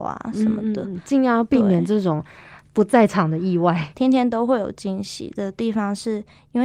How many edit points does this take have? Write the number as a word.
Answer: one